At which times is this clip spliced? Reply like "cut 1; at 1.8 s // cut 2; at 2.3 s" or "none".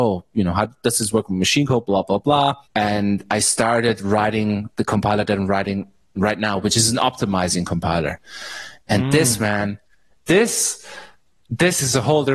cut 1; at 2.7 s